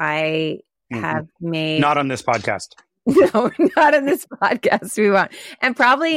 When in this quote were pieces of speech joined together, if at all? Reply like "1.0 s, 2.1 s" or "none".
none